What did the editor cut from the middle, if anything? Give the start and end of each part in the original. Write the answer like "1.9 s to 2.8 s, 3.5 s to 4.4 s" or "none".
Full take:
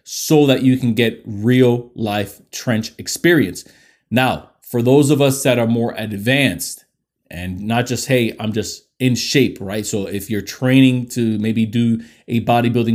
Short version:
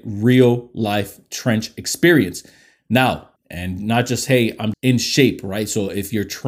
4.6 s to 7.2 s, 8.5 s to 8.9 s